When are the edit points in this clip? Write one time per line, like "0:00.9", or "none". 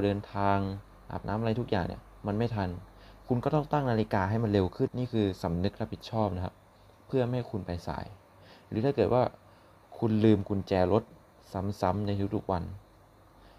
0:04.9